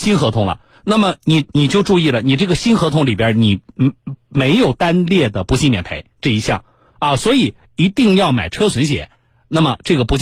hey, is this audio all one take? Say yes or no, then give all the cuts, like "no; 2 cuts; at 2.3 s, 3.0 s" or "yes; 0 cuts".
yes; 0 cuts